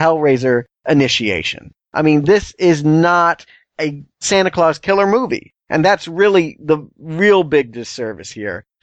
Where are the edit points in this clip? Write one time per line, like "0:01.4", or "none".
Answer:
none

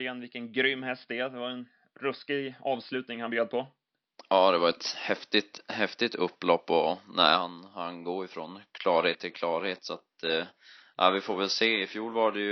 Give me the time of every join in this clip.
none

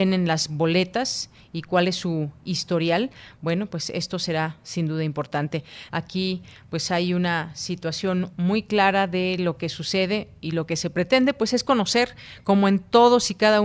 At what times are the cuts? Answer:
0:05.9

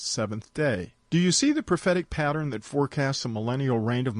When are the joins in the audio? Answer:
0:01.1

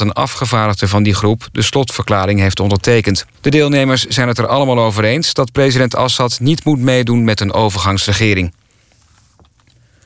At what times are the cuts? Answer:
0:03.3

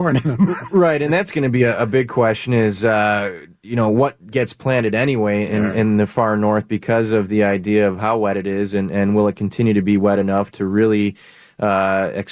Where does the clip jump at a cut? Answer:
none

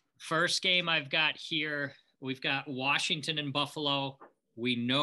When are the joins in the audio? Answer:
none

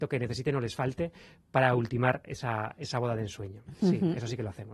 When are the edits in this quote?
none

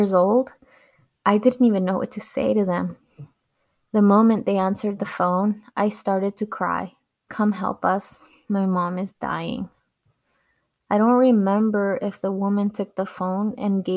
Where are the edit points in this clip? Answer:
0:07.3

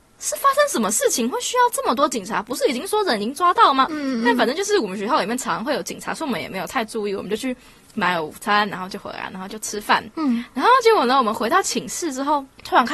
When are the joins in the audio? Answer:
0:03.9

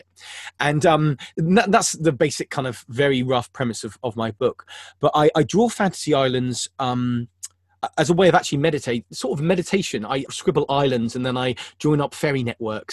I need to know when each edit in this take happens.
0:10.3

